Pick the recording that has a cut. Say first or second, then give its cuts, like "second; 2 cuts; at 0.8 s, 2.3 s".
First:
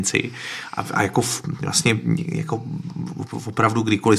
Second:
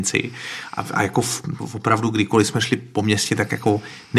second; 1 cut; at 1.6 s